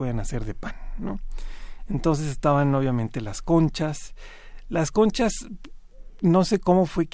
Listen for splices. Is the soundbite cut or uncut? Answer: uncut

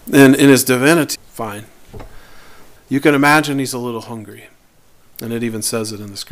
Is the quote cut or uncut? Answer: cut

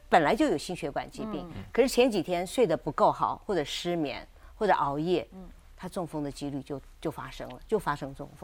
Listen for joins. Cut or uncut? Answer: uncut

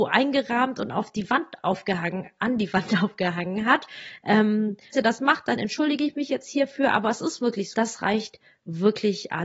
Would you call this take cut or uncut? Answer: cut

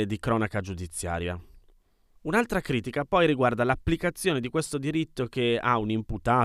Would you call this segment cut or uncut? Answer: cut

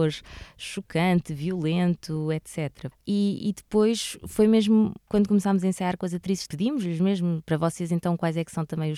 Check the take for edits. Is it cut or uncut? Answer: cut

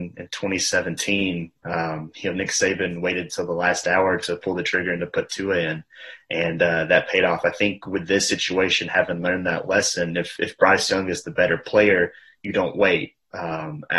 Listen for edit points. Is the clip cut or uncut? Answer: uncut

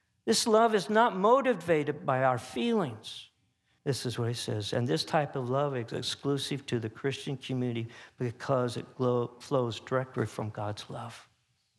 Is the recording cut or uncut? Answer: cut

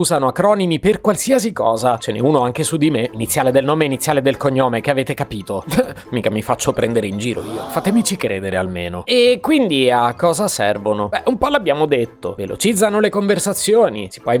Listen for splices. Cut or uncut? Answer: uncut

